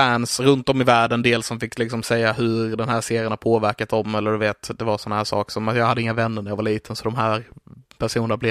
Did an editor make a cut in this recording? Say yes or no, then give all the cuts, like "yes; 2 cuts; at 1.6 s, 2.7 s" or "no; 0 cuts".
no; 0 cuts